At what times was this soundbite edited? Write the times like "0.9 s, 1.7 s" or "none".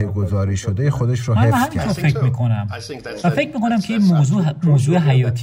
none